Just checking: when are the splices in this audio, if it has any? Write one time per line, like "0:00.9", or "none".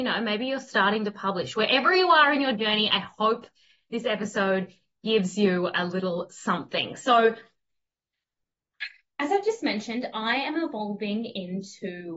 none